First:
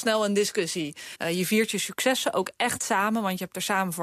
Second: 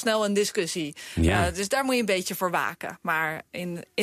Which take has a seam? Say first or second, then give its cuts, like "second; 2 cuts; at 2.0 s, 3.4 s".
first; 1 cut; at 1.1 s